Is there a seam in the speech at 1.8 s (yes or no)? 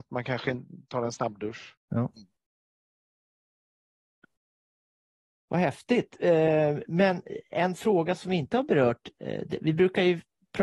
yes